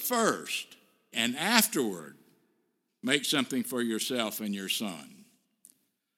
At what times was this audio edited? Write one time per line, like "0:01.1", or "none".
0:01.1